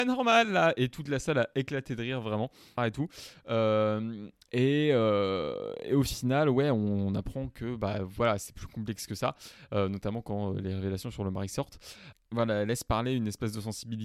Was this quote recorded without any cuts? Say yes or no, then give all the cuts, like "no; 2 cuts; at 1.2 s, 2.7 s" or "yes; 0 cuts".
no; 2 cuts; at 2.8 s, 12.1 s